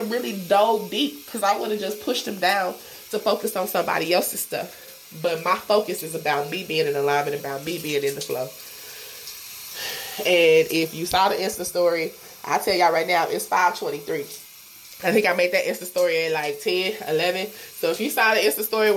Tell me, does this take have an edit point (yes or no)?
yes